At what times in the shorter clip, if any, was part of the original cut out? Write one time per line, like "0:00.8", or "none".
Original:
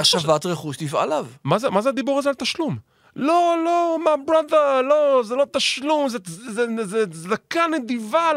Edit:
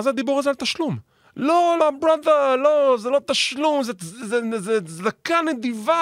0:01.8